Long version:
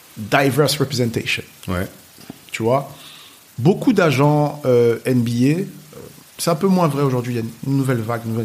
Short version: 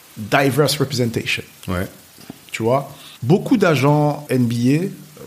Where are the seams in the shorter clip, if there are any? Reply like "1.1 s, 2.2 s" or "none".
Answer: 3.2 s, 4.3 s